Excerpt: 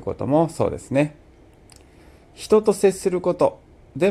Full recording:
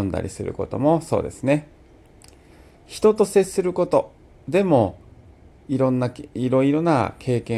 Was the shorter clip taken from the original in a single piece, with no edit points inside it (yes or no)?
yes